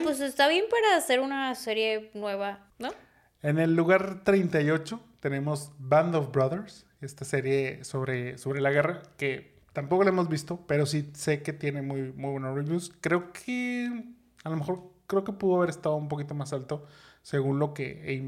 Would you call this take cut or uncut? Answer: cut